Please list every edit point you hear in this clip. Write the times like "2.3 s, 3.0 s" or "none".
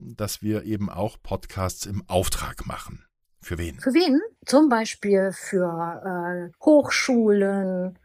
4.4 s, 6.5 s